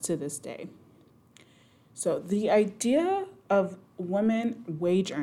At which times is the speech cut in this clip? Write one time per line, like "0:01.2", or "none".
none